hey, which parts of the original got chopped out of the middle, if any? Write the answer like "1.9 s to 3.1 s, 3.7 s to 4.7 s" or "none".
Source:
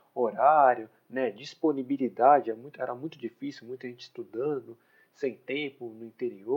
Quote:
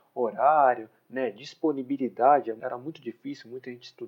2.6 s to 2.8 s